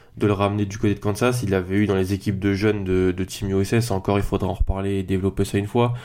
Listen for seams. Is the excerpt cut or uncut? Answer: uncut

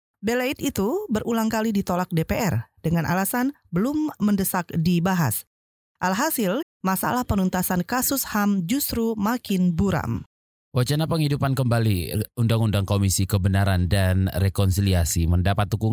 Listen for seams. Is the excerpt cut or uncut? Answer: cut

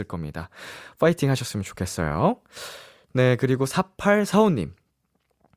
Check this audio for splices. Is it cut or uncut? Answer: uncut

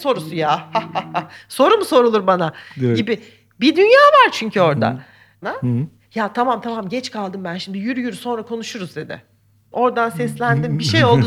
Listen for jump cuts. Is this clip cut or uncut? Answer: cut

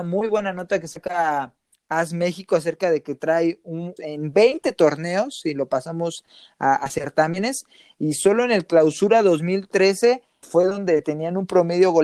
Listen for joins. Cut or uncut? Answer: cut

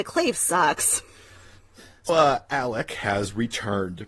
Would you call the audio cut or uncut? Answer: cut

